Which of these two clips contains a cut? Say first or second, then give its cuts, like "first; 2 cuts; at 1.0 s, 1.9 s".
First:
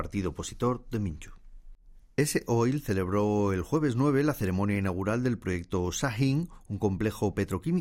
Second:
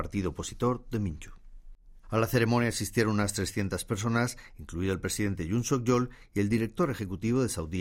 second; 1 cut; at 2.0 s